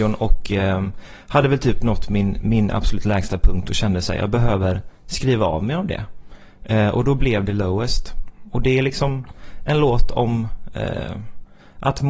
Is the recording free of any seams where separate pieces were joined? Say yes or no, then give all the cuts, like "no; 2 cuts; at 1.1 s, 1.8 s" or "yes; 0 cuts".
yes; 0 cuts